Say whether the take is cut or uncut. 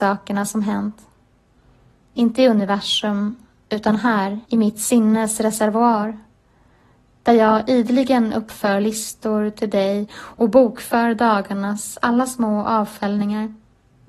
cut